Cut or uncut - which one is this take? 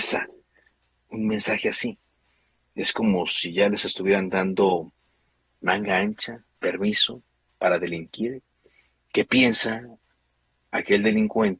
uncut